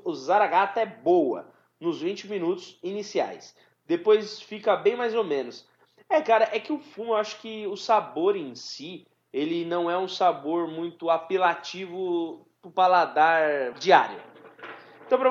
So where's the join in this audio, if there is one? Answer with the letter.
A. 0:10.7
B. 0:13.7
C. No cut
B